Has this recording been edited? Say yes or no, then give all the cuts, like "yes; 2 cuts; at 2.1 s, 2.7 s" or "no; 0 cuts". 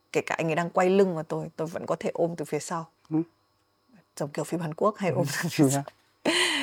no; 0 cuts